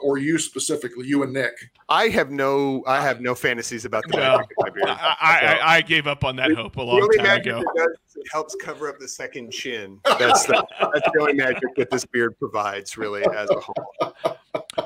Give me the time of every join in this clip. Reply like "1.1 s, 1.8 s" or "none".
none